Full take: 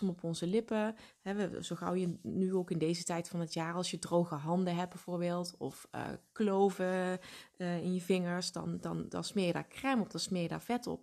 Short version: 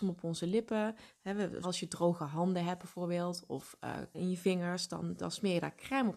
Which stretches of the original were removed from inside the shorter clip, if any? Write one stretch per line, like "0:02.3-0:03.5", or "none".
0:01.6-0:03.7
0:06.3-0:07.8
0:08.8-0:09.1